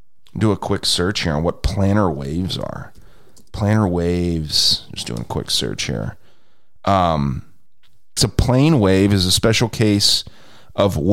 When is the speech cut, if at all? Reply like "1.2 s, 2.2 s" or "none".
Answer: 8.2 s